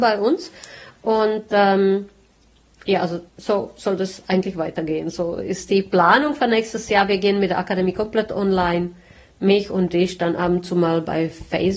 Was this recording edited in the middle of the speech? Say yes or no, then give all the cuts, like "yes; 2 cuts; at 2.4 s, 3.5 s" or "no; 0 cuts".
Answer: yes; 1 cut; at 3.3 s